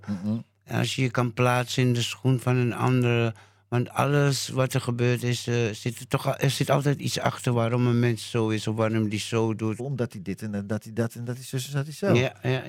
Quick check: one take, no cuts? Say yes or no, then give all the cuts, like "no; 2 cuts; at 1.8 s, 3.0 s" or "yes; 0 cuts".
no; 1 cut; at 9.8 s